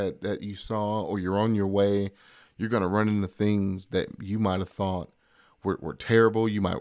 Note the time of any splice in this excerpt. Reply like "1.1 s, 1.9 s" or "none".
2.4 s